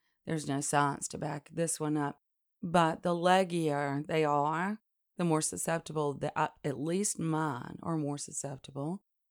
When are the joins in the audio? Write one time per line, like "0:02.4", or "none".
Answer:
none